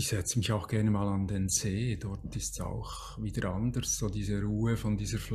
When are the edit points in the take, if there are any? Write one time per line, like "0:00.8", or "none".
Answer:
none